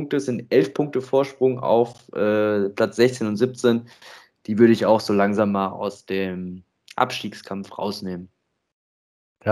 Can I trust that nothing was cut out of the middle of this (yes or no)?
yes